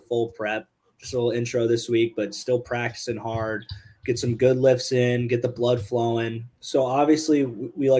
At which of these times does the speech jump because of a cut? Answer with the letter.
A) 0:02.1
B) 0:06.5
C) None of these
B